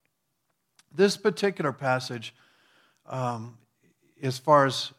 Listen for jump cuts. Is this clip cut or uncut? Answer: uncut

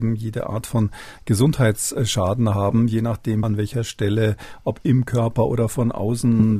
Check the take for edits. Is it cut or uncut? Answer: cut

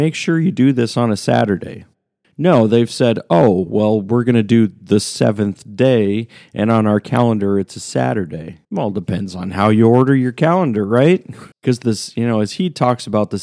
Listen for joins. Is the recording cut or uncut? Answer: cut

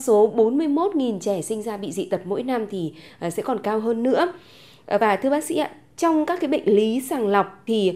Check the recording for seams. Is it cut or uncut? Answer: uncut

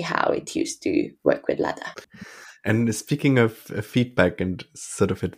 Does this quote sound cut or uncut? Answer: cut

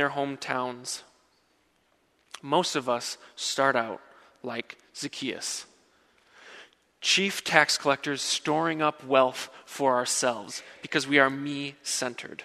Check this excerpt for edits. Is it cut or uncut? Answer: uncut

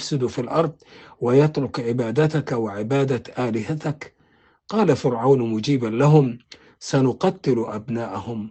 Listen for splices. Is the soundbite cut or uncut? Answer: uncut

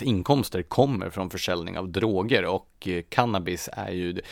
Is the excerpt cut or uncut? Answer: uncut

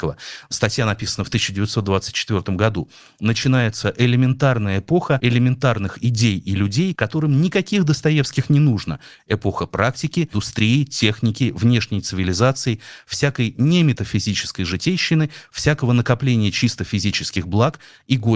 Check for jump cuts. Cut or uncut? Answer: cut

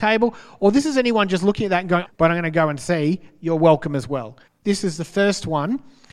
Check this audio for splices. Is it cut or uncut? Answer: cut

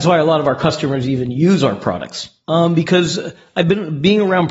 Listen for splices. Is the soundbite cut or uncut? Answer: cut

